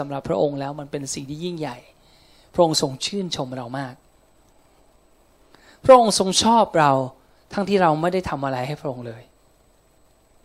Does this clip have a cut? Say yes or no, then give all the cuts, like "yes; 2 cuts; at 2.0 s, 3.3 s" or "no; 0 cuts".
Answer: yes; 1 cut; at 7.7 s